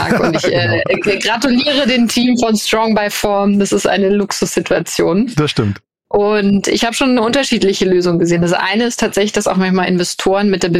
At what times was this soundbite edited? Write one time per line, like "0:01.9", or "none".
none